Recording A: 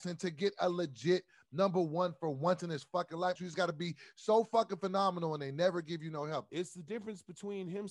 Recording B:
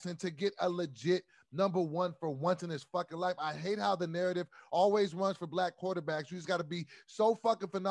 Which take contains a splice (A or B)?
A